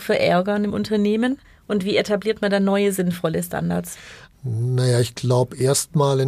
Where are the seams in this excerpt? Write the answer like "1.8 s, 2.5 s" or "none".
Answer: none